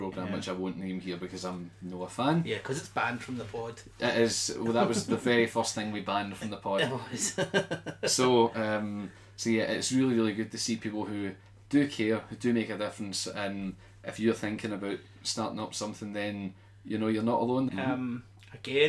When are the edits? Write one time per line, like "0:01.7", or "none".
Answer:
0:17.7

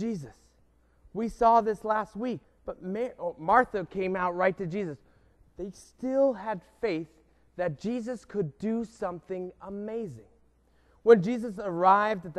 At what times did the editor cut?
0:02.4
0:05.4

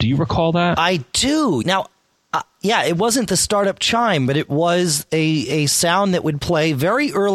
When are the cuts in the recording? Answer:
0:01.6

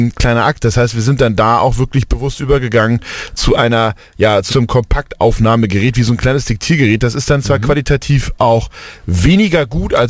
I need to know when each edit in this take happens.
0:04.5

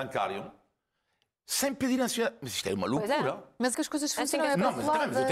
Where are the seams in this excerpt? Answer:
0:03.7

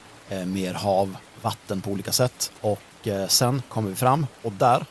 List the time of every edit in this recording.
0:02.6

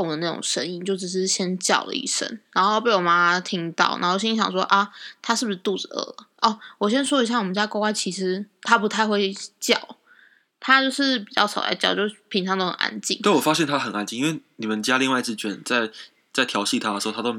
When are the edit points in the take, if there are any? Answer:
0:15.4

